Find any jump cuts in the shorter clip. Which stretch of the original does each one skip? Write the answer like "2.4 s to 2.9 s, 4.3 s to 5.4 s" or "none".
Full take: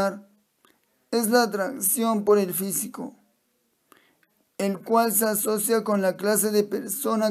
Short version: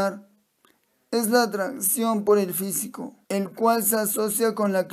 3.2 s to 4.5 s